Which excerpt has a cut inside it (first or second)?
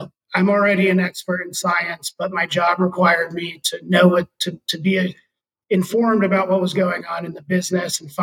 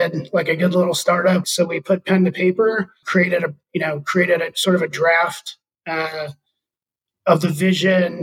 second